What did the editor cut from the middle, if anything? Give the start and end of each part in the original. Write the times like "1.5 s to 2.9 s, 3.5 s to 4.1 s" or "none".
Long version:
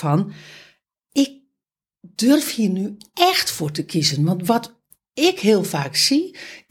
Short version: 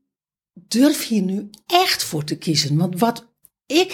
none